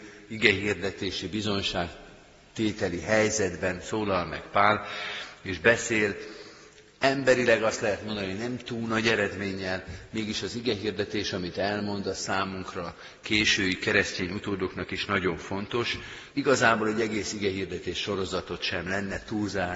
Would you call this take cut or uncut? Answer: cut